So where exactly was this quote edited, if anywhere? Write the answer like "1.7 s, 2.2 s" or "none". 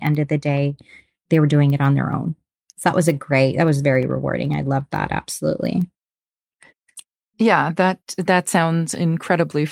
none

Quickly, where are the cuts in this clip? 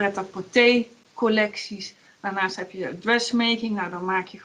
none

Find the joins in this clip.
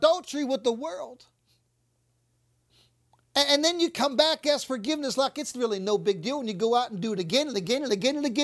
none

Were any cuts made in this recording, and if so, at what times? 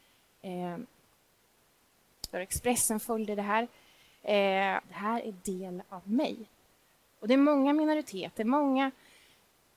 2.3 s, 4.8 s

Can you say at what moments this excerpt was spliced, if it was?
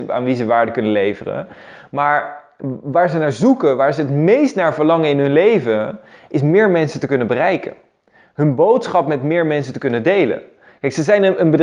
none

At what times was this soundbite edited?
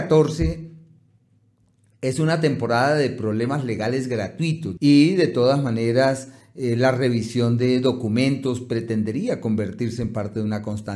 4.8 s

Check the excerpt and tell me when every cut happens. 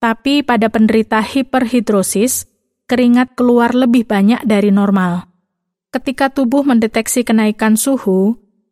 5.7 s

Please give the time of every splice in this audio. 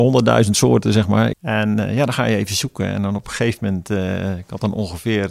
1.3 s

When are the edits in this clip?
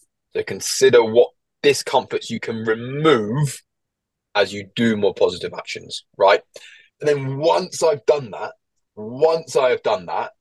6.9 s

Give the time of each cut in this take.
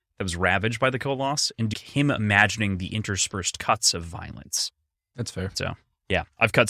1.7 s, 4.9 s

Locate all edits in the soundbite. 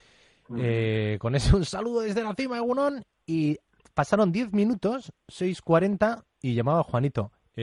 none

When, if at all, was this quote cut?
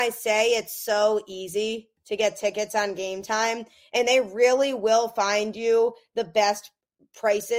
none

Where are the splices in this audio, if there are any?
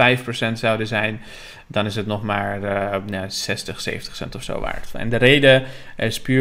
none

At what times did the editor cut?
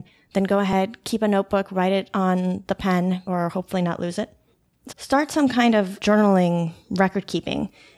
3.3 s, 4.9 s

